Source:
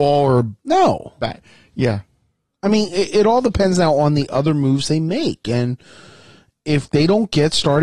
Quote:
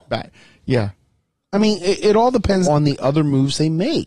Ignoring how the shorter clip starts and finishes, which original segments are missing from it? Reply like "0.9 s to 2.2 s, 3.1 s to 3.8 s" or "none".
3.7 s to 3.9 s